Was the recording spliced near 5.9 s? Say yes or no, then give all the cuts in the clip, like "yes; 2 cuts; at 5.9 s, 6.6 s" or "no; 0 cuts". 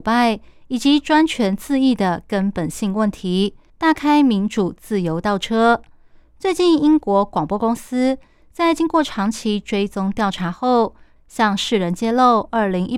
no; 2 cuts; at 3.7 s, 11.2 s